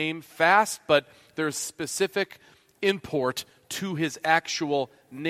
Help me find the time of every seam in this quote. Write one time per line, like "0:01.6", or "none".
none